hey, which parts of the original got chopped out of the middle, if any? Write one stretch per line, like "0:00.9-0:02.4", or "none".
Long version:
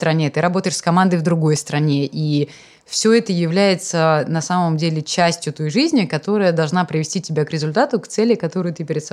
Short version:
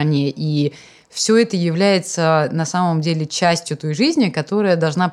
none